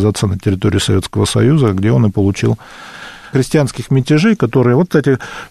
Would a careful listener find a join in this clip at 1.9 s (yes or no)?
no